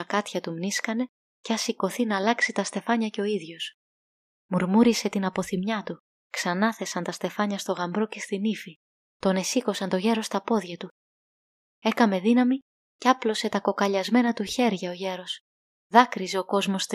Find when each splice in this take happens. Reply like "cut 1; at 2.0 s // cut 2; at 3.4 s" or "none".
cut 1; at 6.2 s // cut 2; at 15.8 s